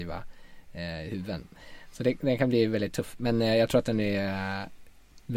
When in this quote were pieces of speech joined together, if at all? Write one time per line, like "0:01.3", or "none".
none